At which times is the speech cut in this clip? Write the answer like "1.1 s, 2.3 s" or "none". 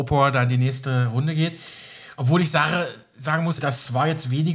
3.6 s